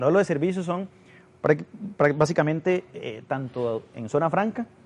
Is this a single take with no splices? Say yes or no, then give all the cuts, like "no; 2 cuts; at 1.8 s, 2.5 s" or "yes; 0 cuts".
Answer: yes; 0 cuts